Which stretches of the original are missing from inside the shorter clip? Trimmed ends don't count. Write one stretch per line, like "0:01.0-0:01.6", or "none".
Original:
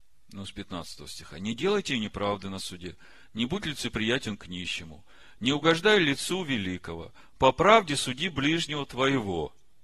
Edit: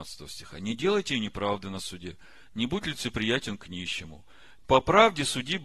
0:05.4-0:07.3